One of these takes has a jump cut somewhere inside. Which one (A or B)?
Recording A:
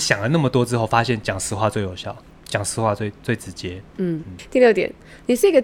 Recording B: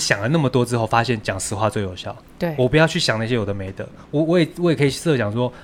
A